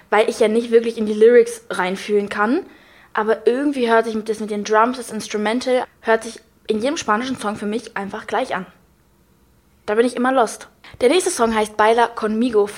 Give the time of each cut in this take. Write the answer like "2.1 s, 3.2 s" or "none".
5.8 s

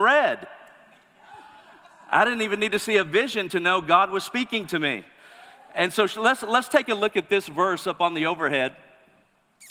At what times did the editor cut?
none

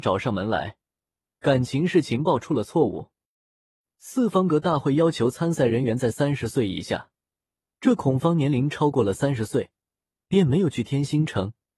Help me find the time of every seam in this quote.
none

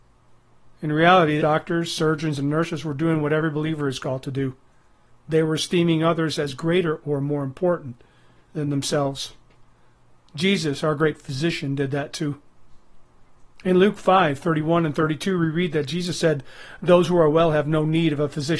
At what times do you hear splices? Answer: 1.4 s

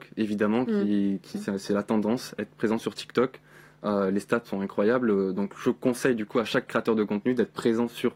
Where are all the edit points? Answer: 1.3 s, 4.4 s

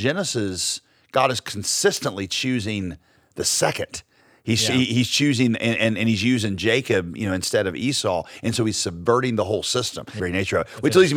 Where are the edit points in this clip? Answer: 10.2 s

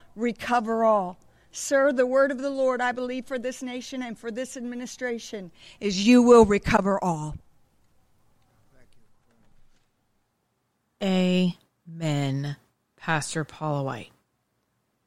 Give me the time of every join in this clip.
none

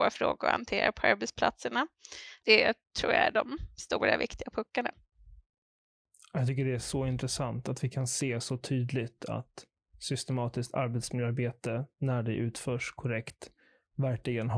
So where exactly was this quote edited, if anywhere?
2.4 s

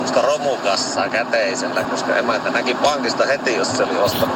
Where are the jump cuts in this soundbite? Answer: 1.9 s

